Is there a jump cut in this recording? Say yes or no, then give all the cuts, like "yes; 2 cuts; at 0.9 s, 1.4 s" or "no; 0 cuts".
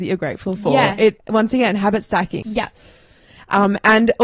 yes; 2 cuts; at 1.2 s, 2.4 s